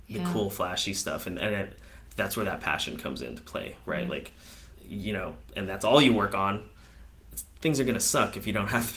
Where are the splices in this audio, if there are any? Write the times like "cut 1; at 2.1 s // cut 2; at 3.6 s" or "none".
cut 1; at 4.7 s